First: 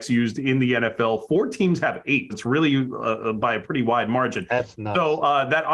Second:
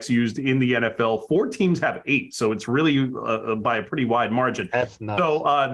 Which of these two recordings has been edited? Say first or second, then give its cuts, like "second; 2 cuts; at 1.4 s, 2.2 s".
first; 1 cut; at 2.3 s